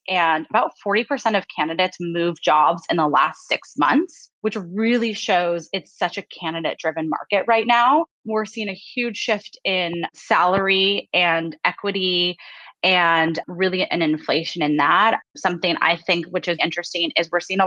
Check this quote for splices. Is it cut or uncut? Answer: cut